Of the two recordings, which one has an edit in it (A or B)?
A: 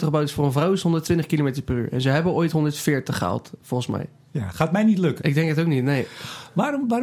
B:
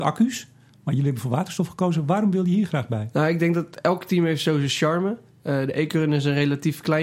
A